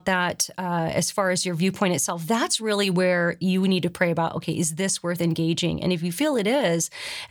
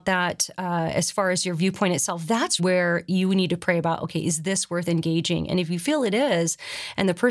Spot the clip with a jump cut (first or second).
second